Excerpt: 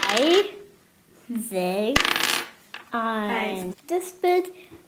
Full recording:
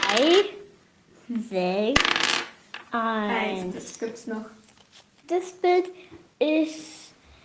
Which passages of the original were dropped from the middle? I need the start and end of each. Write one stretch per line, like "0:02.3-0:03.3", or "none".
0:03.7-0:05.1